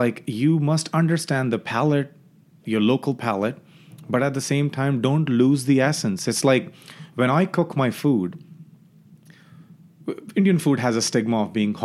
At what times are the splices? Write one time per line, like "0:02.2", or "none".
none